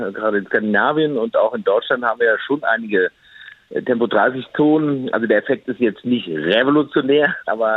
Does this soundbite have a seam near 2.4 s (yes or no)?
no